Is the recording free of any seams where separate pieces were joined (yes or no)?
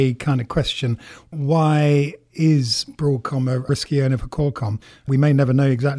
yes